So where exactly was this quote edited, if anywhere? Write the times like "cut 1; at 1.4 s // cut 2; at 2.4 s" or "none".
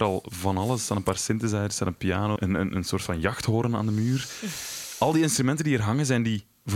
cut 1; at 2.4 s